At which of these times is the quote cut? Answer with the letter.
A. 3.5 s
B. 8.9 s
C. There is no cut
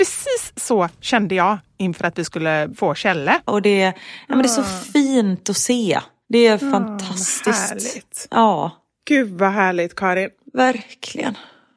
A